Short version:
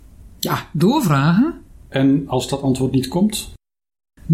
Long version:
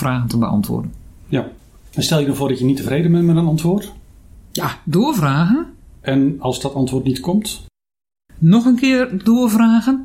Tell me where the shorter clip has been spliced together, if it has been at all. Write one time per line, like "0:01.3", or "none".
none